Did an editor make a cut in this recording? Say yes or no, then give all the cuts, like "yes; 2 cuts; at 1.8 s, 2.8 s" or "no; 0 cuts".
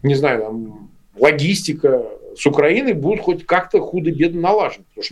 no; 0 cuts